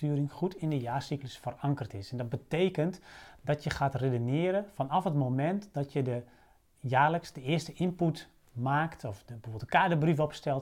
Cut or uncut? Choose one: uncut